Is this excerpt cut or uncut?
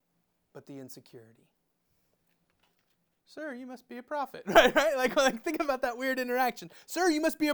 cut